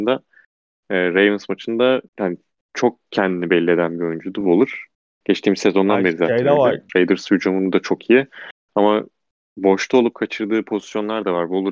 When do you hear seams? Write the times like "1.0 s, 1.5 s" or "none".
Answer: 2.1 s, 6.9 s